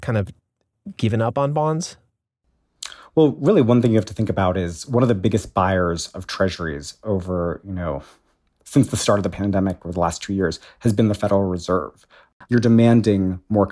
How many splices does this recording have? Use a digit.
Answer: 1